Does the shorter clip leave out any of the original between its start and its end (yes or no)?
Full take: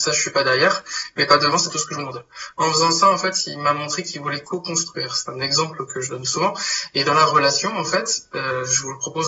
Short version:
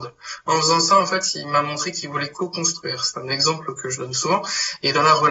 no